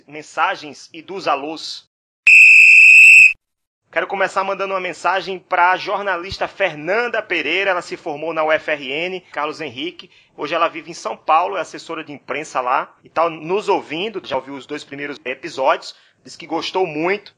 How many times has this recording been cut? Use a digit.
1